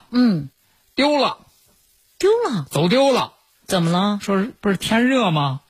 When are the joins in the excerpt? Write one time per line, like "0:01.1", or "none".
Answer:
0:03.5